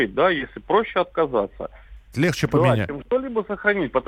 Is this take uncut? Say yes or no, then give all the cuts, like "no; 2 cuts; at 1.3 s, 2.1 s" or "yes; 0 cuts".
no; 1 cut; at 2.1 s